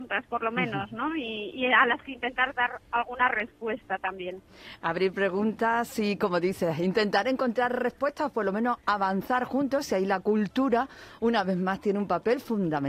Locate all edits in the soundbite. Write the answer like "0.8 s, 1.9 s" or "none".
none